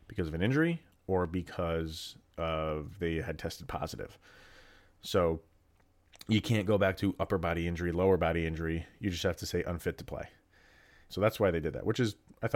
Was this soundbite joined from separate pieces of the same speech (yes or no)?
yes